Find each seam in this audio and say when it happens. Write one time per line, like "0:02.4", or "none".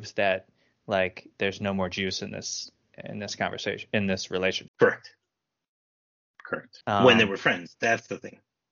0:04.7
0:06.8